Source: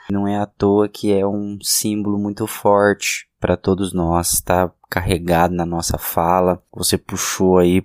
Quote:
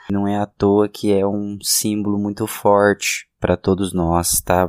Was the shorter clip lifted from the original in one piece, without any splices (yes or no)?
yes